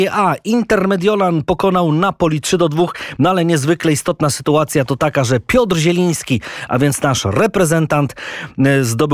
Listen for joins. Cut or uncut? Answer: uncut